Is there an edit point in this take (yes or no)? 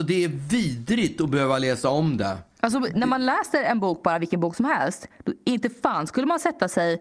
no